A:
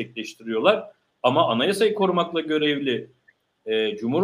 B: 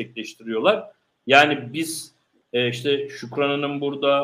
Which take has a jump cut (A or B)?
B